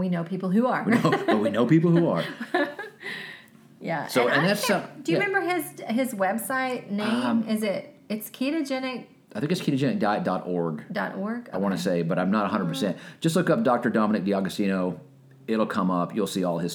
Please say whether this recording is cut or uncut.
uncut